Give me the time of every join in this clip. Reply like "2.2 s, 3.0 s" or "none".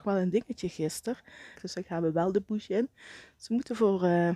1.6 s

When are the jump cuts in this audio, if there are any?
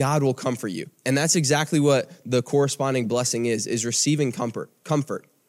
none

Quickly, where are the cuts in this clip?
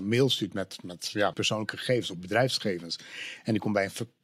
1.3 s

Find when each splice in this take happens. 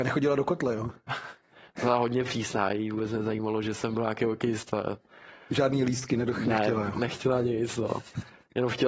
none

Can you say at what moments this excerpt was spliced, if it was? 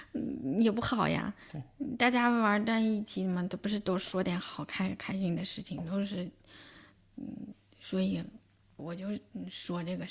none

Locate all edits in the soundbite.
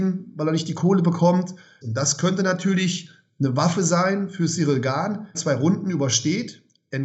1.8 s, 5.3 s

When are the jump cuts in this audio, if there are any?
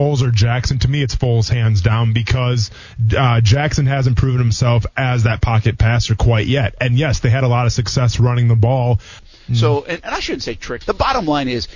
9.2 s, 10.8 s

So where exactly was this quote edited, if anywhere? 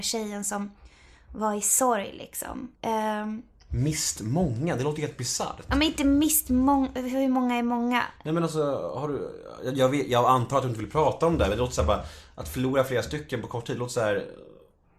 2.8 s

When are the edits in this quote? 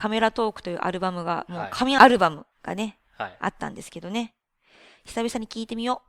2.5 s

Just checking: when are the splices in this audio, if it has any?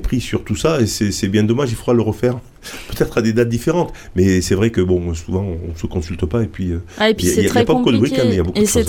none

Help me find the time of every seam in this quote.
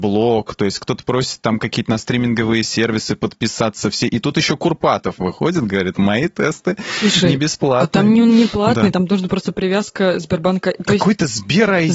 none

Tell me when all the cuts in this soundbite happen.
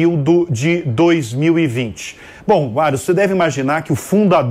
none

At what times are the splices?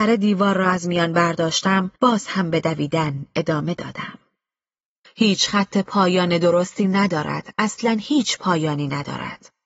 2.0 s, 5.0 s

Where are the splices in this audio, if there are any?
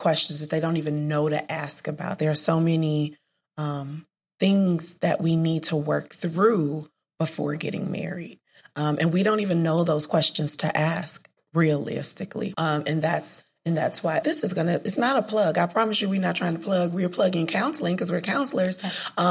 12.5 s, 14.2 s

